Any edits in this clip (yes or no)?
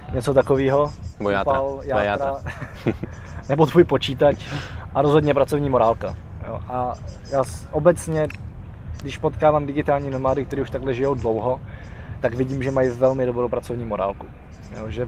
no